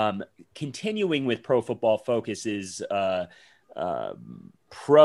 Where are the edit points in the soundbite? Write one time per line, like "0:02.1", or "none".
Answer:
none